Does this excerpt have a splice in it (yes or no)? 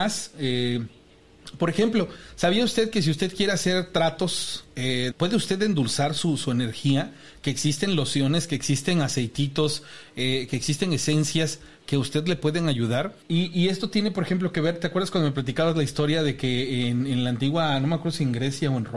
yes